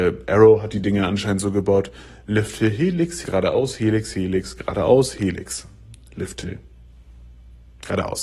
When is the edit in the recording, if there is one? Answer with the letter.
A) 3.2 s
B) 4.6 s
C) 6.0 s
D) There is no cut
A